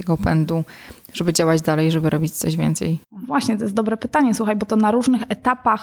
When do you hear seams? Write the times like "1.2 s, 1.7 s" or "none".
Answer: 3.0 s

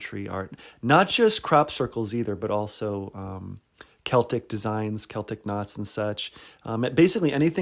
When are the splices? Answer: none

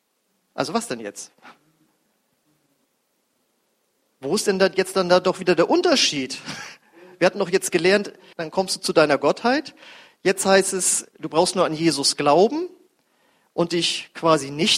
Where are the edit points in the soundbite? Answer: 8.3 s

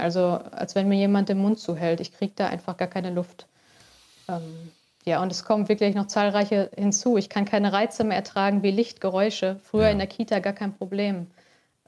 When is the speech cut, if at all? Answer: none

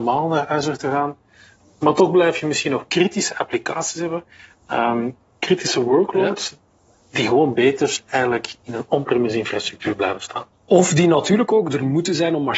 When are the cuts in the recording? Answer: none

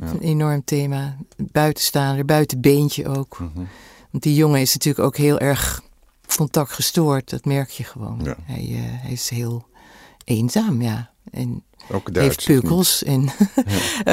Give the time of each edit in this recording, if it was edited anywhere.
none

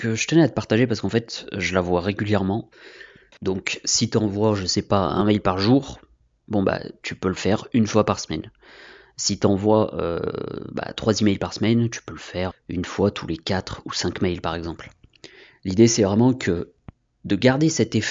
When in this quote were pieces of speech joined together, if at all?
3.3 s, 12.5 s

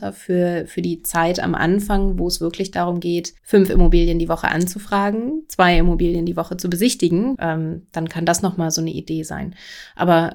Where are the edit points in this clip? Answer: 3.4 s, 7.3 s

